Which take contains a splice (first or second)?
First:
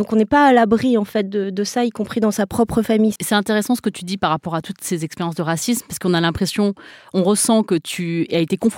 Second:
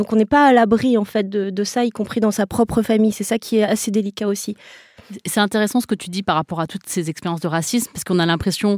first